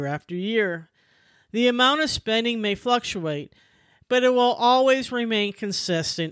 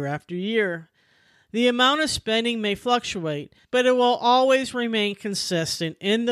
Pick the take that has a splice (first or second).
second